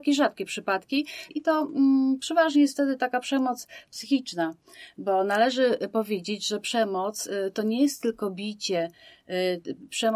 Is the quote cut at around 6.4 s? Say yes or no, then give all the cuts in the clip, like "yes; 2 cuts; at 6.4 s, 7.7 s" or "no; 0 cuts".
no; 1 cut; at 1.3 s